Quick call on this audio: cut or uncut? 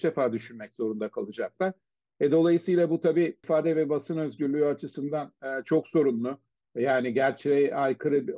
uncut